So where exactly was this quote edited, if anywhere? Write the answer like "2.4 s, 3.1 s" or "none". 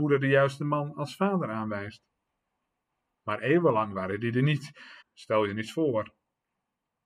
3.2 s, 5.0 s